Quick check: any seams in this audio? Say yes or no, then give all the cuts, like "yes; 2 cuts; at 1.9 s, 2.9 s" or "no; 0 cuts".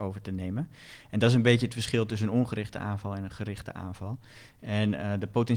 no; 0 cuts